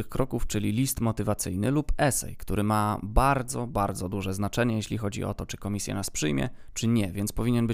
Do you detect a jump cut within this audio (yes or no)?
no